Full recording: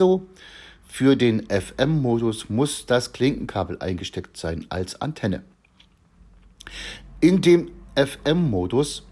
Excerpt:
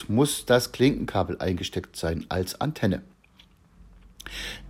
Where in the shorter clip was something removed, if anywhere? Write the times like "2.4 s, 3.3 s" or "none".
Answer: none

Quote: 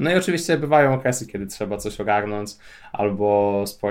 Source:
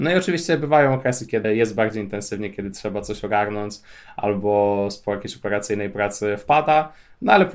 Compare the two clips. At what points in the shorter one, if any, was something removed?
1.3 s

